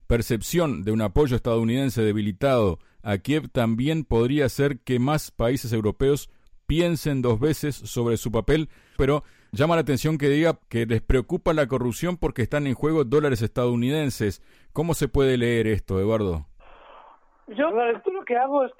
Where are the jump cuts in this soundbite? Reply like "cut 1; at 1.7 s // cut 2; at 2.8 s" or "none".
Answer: cut 1; at 9.0 s // cut 2; at 17.7 s